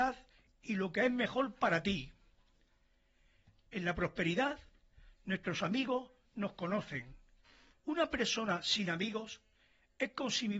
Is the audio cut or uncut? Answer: cut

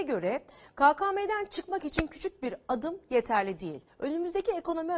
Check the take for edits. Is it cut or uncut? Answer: cut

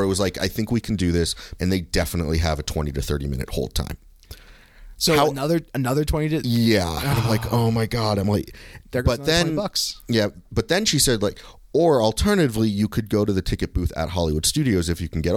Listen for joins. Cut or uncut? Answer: cut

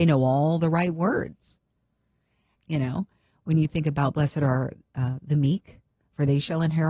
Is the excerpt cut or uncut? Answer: cut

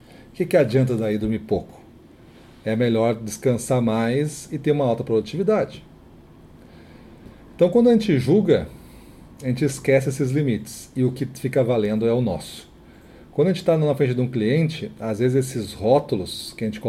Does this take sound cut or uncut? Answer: uncut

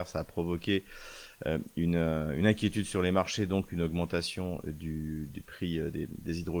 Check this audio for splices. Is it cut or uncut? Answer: uncut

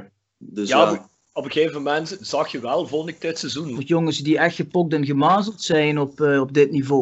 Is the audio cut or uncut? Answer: cut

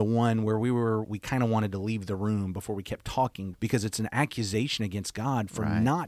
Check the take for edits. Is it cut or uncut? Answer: cut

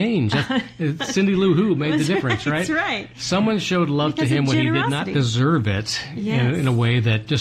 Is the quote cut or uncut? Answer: uncut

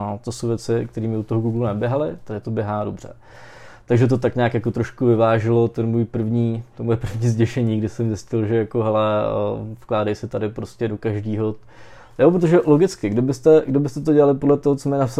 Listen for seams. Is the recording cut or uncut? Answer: uncut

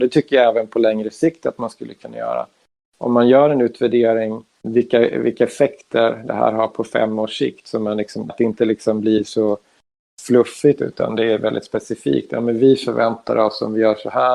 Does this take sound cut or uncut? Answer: cut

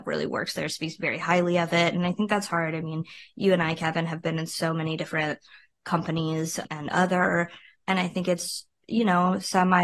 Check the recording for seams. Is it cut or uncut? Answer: cut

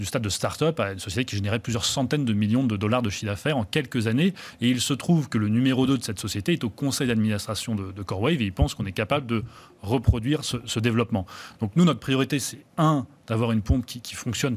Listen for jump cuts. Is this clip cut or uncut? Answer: uncut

